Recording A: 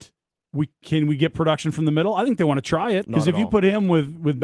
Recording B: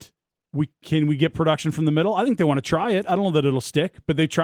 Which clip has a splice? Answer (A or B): A